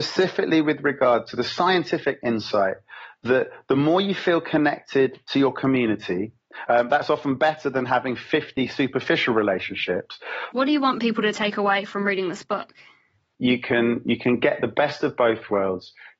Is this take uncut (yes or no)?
no